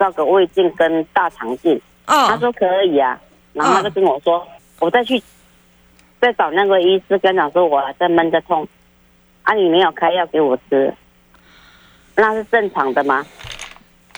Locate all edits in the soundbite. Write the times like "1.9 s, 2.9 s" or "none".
4.6 s